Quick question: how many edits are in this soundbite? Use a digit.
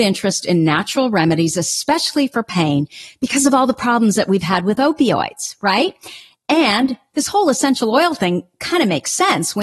0